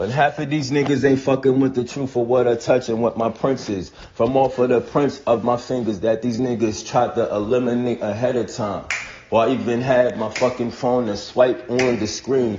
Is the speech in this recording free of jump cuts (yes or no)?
yes